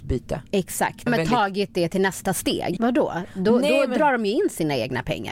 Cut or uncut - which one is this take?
cut